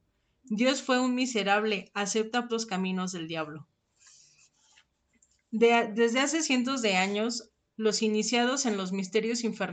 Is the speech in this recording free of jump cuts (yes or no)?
no